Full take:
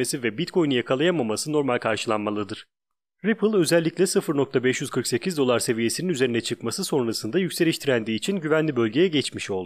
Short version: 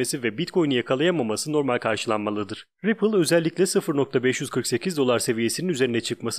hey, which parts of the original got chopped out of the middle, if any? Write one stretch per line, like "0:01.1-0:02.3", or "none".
0:02.7-0:03.1